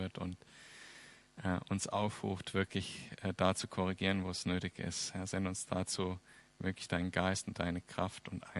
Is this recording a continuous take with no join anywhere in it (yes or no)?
yes